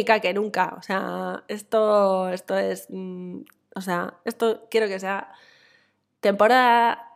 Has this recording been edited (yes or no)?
no